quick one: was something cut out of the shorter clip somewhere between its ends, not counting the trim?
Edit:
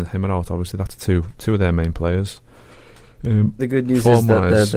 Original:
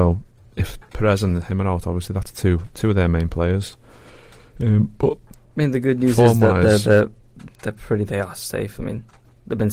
yes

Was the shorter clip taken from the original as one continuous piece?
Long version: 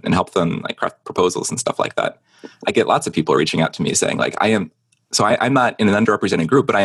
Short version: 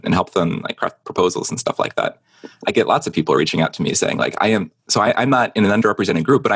no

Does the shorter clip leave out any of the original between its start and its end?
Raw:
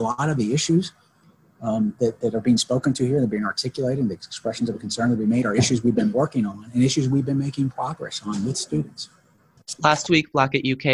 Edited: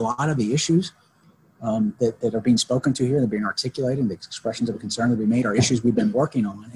no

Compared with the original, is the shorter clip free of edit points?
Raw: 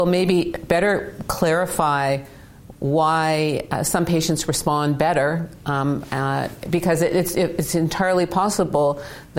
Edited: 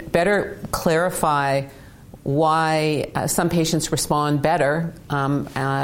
yes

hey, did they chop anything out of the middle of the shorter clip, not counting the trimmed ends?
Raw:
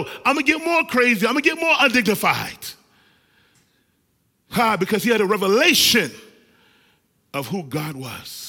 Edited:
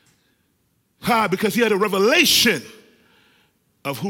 no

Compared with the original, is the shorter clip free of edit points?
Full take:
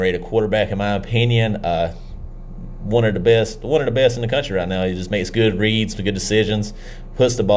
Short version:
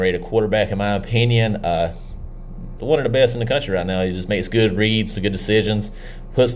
no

